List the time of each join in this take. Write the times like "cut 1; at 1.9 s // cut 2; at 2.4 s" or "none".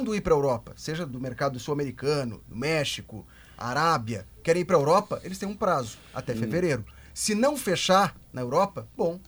none